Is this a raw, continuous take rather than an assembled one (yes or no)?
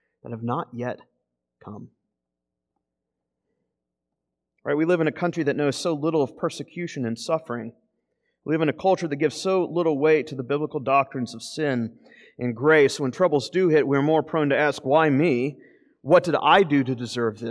yes